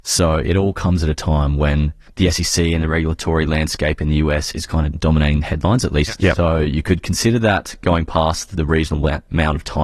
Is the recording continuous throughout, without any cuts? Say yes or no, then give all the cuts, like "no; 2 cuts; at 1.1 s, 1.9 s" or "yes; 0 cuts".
no; 1 cut; at 6.2 s